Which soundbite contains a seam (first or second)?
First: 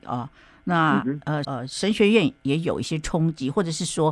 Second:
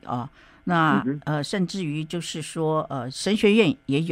first